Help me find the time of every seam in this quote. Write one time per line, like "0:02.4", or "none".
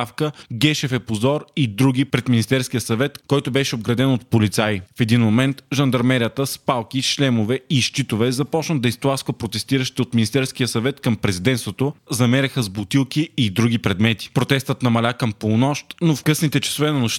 0:12.1